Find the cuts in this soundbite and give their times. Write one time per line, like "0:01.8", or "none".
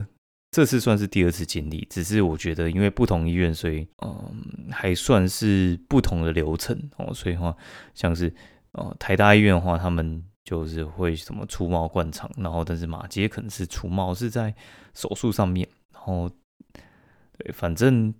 0:03.9